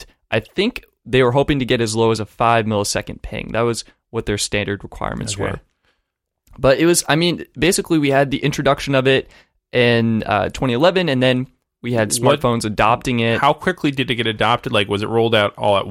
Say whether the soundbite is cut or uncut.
uncut